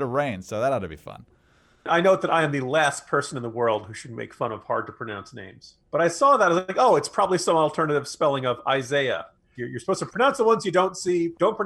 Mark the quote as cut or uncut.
cut